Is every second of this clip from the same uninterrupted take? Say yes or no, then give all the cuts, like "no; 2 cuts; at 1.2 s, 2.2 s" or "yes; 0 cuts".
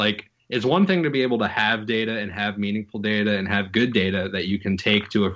yes; 0 cuts